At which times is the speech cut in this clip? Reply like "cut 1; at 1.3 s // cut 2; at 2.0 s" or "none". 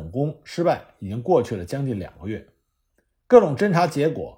none